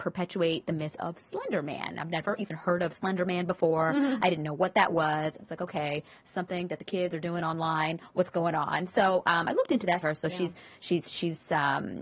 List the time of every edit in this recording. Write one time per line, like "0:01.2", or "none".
0:10.0